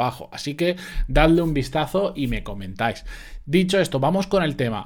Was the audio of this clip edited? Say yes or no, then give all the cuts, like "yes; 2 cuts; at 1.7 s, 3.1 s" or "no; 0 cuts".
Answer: no; 0 cuts